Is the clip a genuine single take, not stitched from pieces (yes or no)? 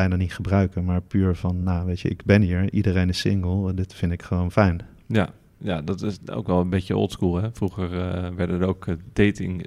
yes